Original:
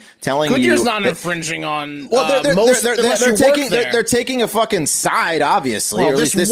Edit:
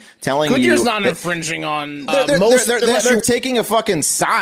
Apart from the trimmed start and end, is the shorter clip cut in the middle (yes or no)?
yes